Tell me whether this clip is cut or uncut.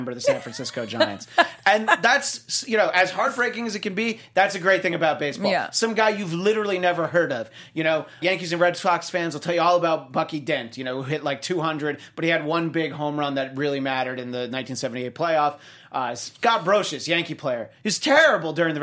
cut